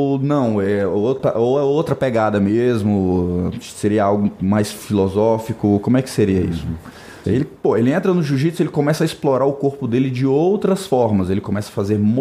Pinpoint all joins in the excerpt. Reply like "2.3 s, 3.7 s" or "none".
7.2 s